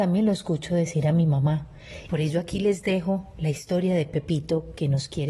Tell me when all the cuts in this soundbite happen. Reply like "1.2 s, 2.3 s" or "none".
2.1 s